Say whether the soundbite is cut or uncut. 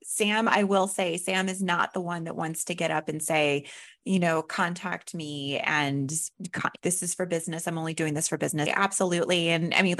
cut